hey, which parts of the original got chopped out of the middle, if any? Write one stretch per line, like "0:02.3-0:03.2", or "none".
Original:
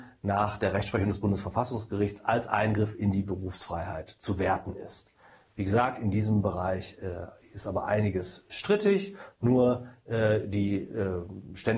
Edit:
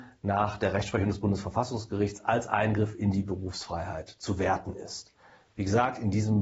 none